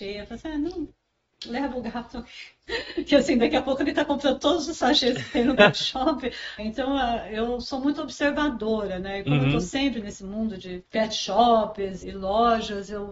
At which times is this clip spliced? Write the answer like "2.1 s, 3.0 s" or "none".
6.6 s, 10.9 s, 12.0 s